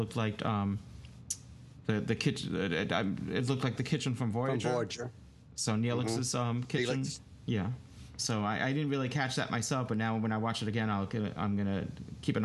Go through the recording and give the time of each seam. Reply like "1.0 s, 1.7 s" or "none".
8.2 s